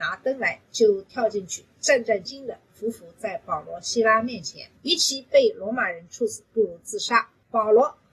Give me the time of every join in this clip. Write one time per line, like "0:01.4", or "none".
0:02.2
0:04.8